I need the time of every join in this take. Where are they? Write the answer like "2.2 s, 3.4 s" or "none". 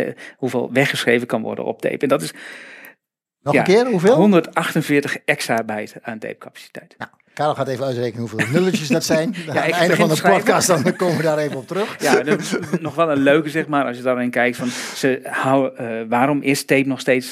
none

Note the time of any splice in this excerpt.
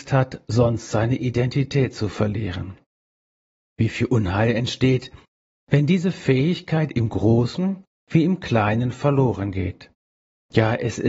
none

